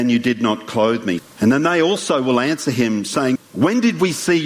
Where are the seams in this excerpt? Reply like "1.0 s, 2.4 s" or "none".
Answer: 1.2 s, 3.4 s

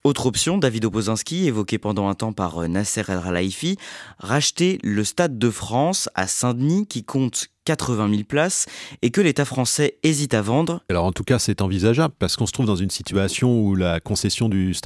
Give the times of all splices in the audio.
10.9 s

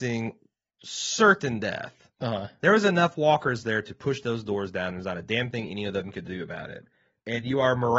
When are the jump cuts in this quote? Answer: none

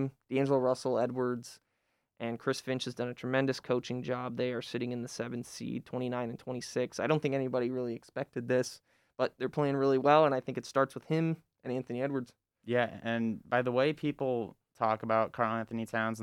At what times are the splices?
none

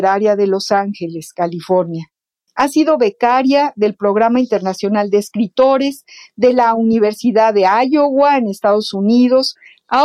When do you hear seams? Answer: 2.5 s

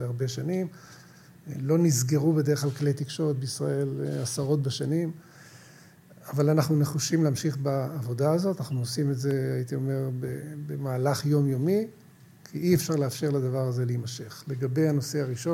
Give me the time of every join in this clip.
none

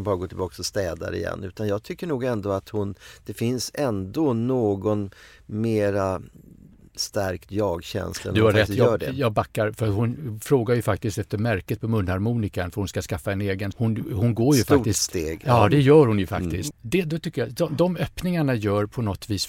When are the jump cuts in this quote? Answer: 13.7 s, 16.7 s

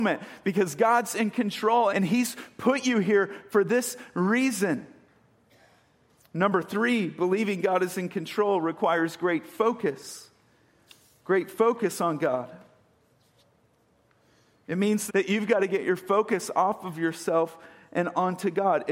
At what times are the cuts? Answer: 1.9 s, 15.1 s

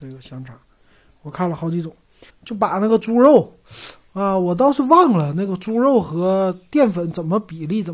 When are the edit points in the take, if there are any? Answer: 2.3 s

